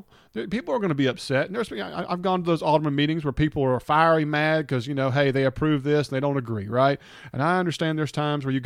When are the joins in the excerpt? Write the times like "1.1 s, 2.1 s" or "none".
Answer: none